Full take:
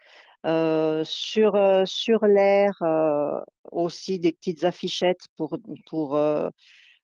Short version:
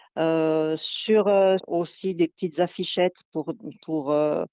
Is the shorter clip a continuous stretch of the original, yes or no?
no